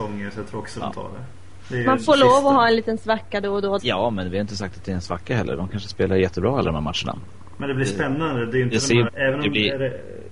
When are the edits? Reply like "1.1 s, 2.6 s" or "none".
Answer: 3.8 s, 9.1 s